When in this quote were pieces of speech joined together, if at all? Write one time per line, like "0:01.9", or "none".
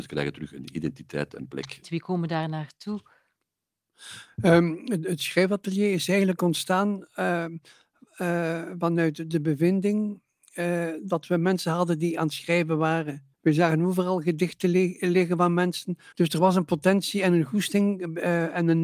0:01.8
0:13.3
0:16.1